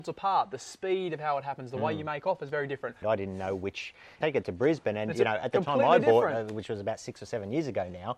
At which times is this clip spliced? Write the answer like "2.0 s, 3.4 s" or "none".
3.0 s, 4.2 s